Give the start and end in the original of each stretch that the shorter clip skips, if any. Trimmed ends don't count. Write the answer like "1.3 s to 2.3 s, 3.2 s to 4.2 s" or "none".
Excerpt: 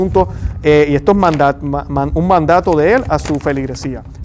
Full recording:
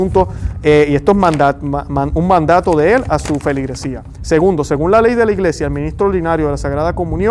none